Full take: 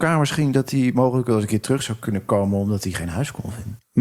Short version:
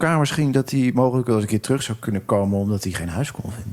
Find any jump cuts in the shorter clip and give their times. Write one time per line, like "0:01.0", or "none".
none